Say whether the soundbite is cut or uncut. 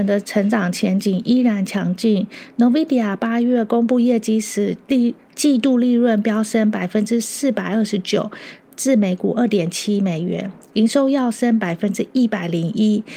uncut